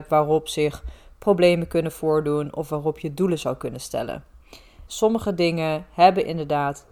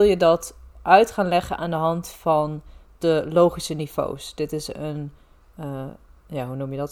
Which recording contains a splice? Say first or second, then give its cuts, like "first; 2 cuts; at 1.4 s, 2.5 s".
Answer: first; 1 cut; at 4.9 s